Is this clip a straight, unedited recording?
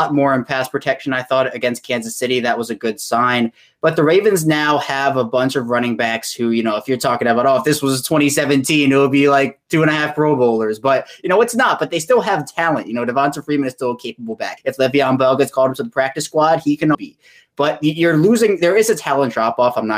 no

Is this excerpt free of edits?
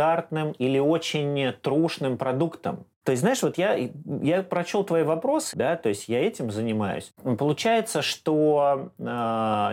no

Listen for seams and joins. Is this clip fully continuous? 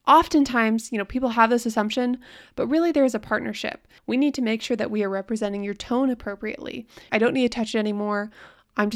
no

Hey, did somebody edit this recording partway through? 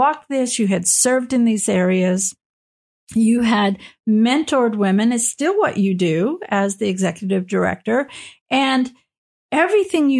no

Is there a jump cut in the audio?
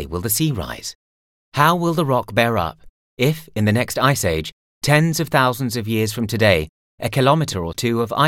no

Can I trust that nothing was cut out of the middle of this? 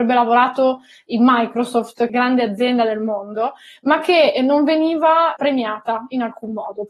no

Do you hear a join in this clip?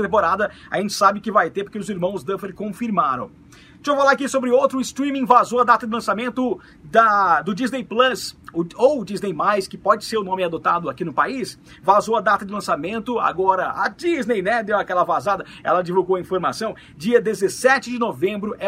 no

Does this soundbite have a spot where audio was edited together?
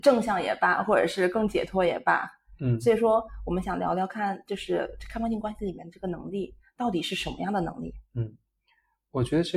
no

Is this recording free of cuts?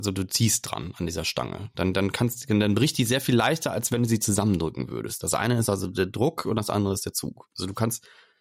yes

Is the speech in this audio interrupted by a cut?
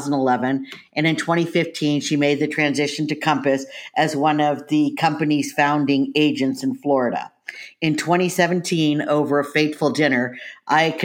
no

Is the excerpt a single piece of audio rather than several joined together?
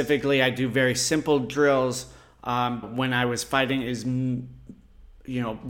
no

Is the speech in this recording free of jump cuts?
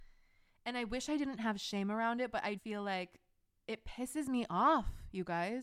no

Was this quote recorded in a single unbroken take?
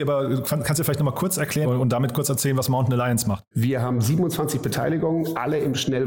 no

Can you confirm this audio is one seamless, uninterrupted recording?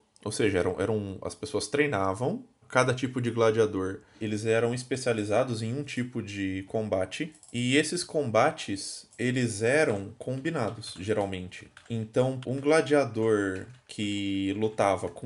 no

